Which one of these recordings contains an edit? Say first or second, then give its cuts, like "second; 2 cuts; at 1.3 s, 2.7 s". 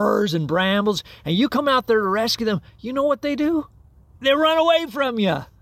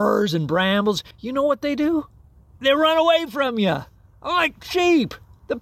second; 1 cut; at 1.1 s